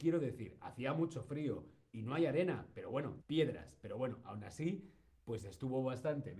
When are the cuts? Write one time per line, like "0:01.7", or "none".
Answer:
0:03.2